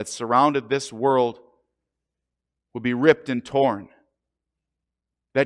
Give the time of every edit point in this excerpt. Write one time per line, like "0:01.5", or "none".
none